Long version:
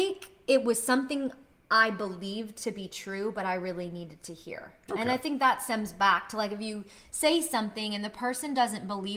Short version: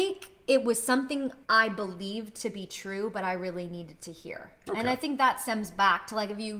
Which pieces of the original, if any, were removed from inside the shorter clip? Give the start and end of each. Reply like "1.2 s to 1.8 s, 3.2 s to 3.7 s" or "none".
1.4 s to 1.6 s

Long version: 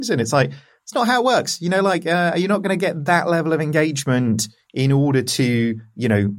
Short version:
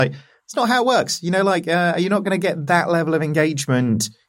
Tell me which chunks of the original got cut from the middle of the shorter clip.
none

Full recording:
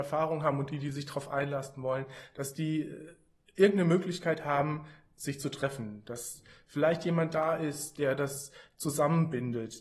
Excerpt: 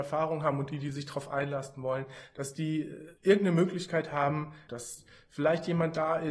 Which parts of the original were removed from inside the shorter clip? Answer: 3.2 s to 3.5 s, 5.0 s to 6.0 s

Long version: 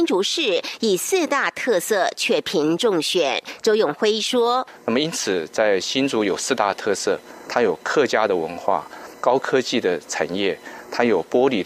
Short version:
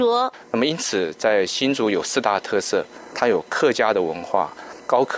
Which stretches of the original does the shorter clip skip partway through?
none

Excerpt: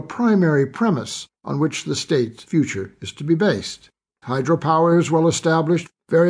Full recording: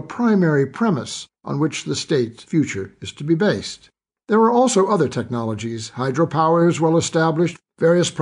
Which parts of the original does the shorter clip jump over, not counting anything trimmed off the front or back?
4.2 s to 5.9 s

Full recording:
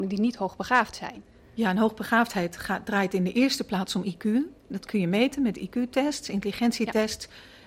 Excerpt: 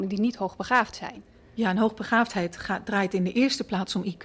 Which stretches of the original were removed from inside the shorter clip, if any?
none

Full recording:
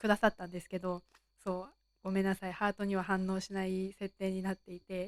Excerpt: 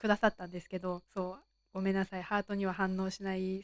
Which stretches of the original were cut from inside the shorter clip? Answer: 1.0 s to 1.3 s

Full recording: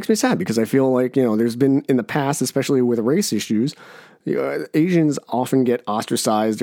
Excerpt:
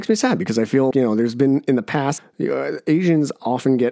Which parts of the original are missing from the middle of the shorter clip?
0.9 s to 1.1 s, 2.4 s to 4.0 s

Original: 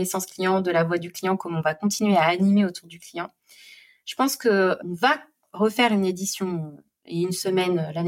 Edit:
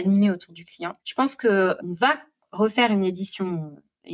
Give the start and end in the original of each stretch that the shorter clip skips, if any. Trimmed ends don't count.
3.3 s to 4.0 s

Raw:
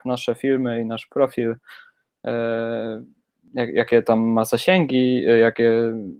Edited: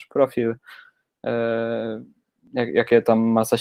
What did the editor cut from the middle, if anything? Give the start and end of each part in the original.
none

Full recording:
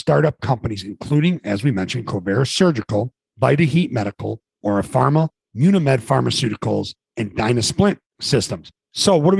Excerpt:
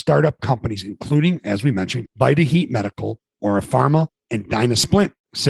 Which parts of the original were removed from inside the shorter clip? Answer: 2.1 s to 3.3 s, 5.4 s to 7.1 s

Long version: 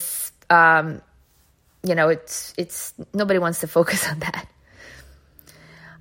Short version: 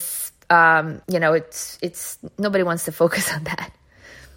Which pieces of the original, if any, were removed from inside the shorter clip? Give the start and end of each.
1.0 s to 1.8 s

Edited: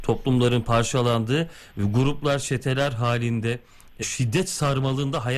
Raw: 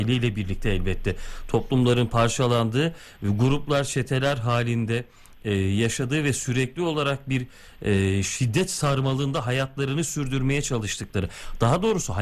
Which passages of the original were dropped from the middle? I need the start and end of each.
5.5 s to 8.2 s

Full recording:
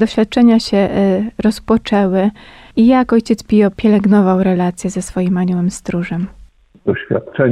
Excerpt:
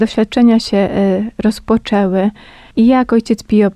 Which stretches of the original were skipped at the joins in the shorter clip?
none

